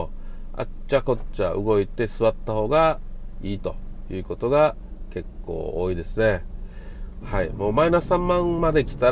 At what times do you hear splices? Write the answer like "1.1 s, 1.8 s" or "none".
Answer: 7.2 s